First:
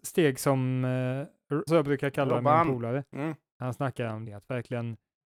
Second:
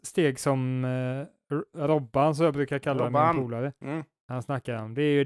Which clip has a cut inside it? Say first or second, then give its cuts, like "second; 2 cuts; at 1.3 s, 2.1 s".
first; 2 cuts; at 1.7 s, 4.3 s